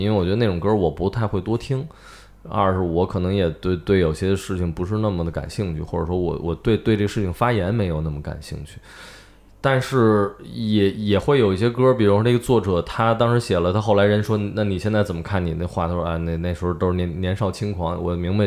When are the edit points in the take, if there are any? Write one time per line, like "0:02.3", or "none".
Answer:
none